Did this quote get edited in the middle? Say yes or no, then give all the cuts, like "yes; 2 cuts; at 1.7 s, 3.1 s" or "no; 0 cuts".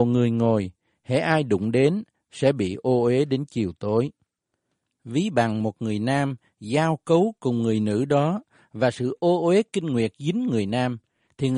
no; 0 cuts